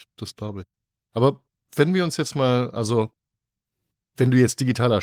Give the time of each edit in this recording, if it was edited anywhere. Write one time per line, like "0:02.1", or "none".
none